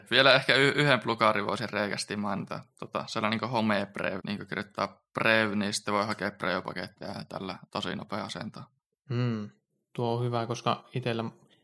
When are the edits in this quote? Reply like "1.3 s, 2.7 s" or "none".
4.2 s